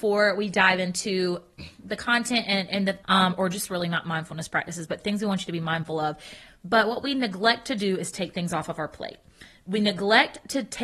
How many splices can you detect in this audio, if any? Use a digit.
2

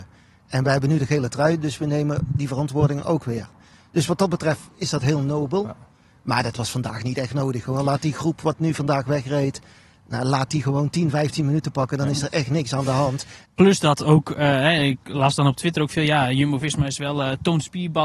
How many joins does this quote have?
1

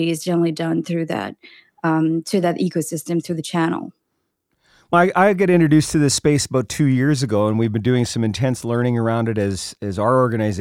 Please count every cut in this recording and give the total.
1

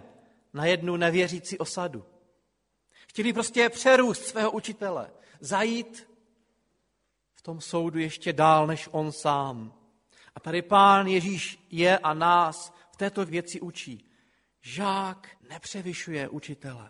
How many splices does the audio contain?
2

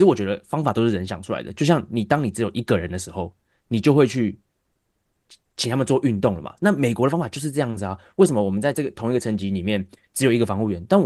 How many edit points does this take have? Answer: 0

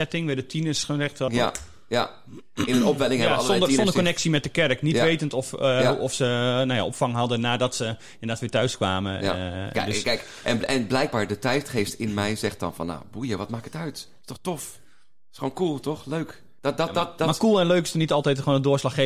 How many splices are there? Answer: 2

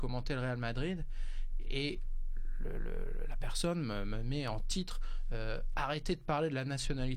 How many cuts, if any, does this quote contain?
0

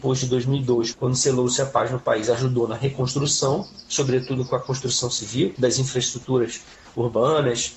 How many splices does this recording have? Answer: 2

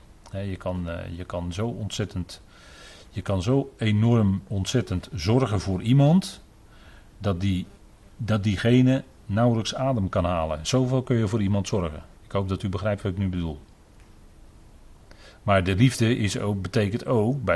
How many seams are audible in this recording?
0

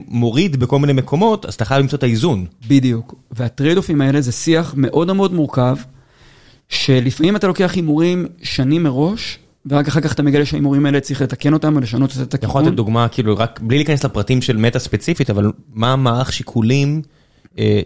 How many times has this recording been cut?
0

